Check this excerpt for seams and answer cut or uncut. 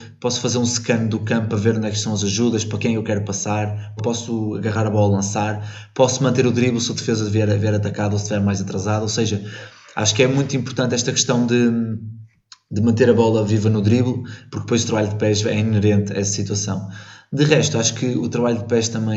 cut